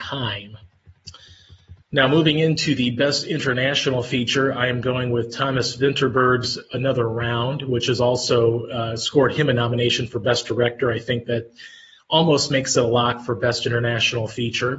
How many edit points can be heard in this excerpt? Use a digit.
1